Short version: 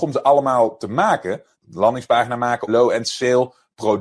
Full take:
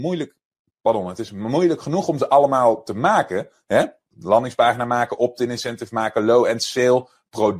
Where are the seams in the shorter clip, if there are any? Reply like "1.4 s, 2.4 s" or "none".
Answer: 1.5 s, 2.7 s